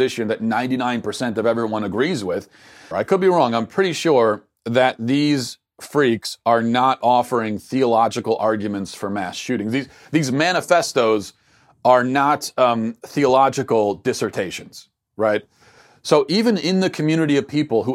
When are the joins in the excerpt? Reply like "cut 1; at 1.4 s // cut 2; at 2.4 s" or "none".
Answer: cut 1; at 2.9 s

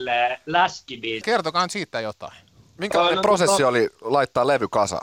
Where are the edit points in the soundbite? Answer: cut 1; at 1.2 s

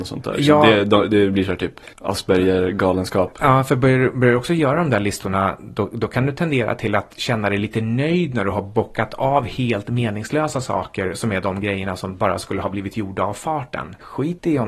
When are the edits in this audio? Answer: none

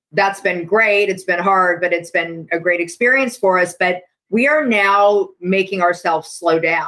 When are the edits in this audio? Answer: none

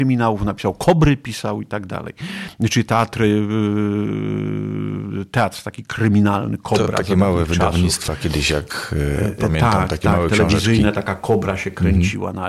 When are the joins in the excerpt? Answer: none

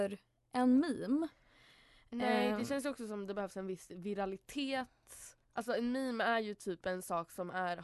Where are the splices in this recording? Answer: cut 1; at 5.4 s

